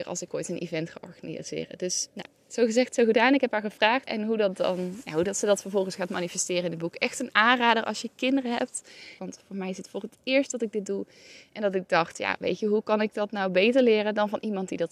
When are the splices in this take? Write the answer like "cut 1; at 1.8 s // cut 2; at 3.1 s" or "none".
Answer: cut 1; at 4.0 s // cut 2; at 9.2 s